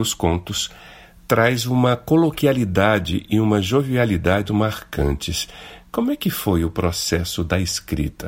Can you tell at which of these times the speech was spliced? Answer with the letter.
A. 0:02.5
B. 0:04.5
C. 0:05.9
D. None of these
B